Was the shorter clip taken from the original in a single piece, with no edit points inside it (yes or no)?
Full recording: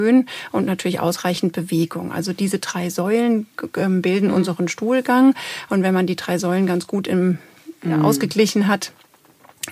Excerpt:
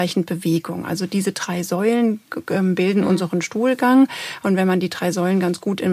yes